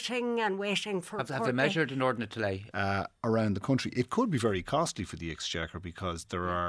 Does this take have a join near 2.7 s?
yes; 1 cut; at 2.7 s

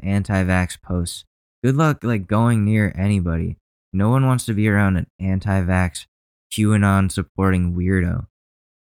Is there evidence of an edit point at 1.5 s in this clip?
no; 0 cuts

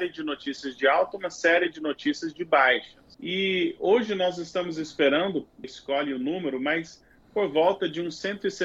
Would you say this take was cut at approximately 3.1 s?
yes; 2 cuts; at 3.1 s, 5.6 s

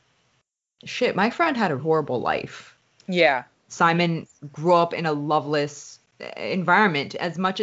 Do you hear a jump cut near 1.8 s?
yes; 2 cuts; at 1.8 s, 3.7 s

